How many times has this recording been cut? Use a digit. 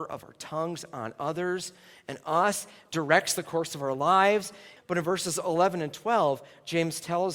1